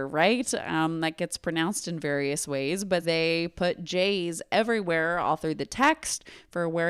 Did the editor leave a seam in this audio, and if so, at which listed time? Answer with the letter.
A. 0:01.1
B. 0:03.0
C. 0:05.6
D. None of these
B